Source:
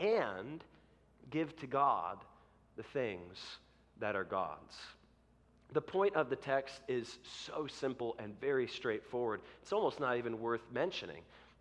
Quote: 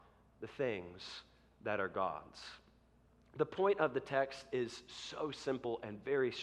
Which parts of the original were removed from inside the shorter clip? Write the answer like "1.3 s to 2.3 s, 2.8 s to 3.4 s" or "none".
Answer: none